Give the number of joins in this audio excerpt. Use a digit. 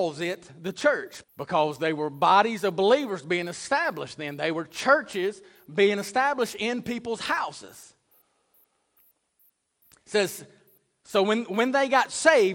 1